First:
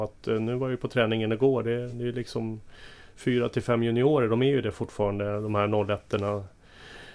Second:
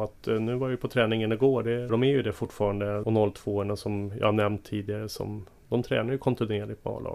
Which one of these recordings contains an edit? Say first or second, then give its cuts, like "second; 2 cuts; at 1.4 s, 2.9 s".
second; 2 cuts; at 1.9 s, 3.0 s